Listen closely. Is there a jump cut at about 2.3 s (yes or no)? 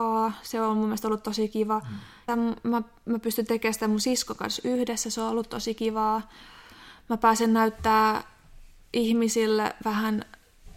yes